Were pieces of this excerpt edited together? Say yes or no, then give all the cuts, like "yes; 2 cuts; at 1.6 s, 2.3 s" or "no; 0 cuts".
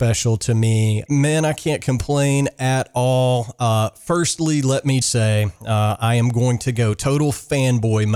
yes; 2 cuts; at 1.1 s, 5.0 s